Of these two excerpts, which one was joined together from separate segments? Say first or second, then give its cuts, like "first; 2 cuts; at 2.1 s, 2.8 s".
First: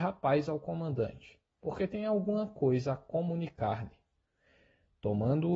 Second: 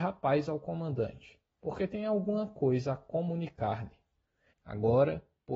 second; 1 cut; at 4.5 s